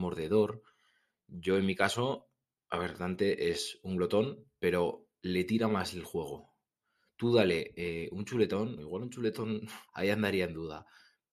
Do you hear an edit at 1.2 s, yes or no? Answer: no